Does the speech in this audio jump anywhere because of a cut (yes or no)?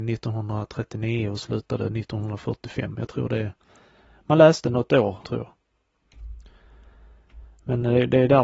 yes